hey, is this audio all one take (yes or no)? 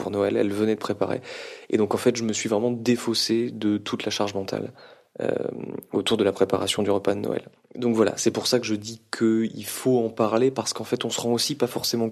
yes